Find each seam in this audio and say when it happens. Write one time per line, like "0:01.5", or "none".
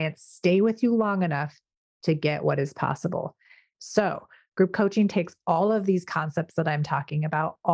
0:03.7